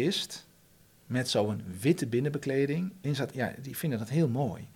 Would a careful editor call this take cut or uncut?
uncut